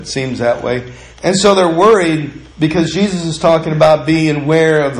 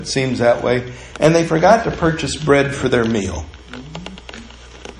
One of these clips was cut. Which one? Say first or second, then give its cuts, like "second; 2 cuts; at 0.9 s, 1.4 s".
first; 2 cuts; at 1.1 s, 2.5 s